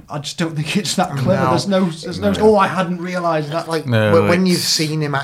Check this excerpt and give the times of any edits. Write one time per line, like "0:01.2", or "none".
0:02.4